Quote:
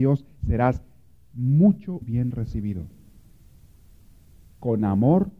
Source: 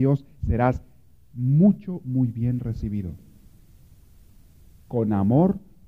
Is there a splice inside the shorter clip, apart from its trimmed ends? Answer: yes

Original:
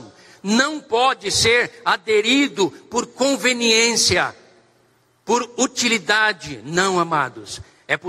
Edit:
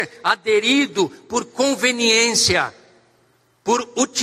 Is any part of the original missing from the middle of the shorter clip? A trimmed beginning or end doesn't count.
no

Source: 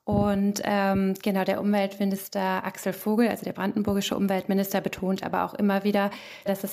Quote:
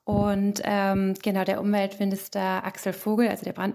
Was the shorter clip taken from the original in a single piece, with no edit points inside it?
yes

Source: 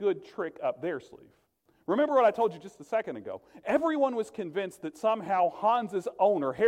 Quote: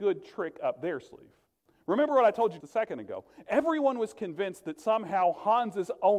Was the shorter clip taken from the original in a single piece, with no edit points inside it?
no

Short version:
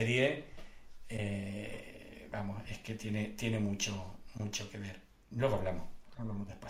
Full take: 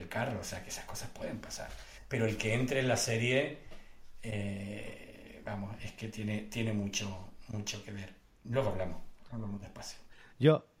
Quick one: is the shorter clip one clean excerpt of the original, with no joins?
yes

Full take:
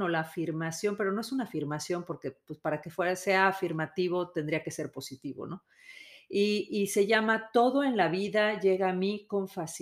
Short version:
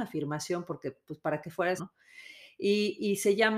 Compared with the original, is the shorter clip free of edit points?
no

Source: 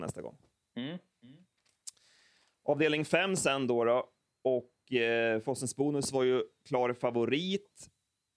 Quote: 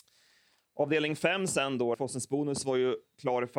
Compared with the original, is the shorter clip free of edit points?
no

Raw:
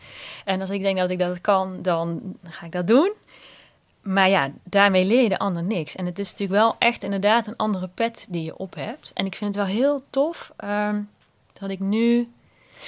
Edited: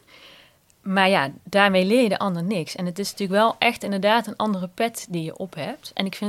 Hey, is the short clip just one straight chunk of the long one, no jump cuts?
yes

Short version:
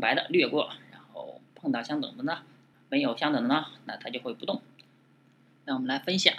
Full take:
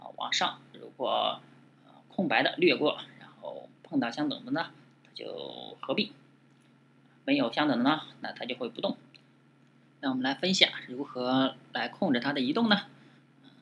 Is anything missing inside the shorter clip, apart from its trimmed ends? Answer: yes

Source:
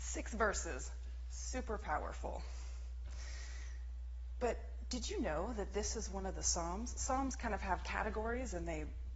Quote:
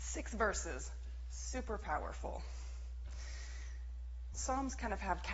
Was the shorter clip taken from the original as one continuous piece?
no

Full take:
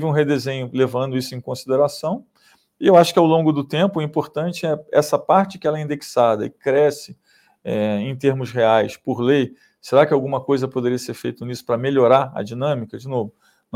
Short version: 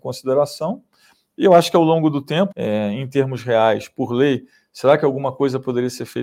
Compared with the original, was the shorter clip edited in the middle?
yes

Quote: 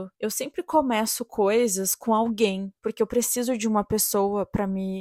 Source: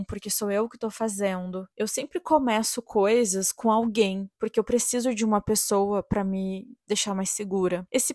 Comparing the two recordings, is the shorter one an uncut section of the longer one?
yes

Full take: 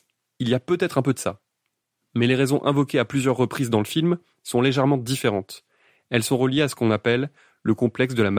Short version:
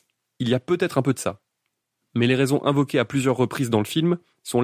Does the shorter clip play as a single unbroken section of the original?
yes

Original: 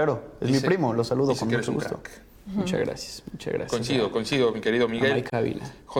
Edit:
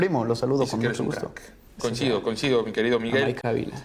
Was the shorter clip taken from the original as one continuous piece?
no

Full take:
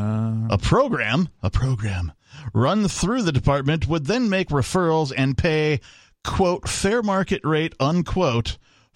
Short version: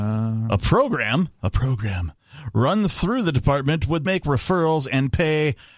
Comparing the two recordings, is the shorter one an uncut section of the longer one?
no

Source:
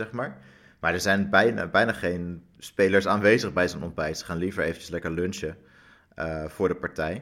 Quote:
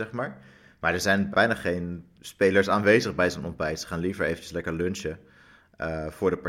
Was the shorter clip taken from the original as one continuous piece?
no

